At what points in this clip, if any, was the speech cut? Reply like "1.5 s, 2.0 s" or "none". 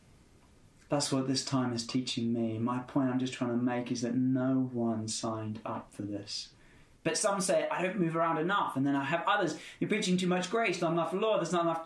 7.0 s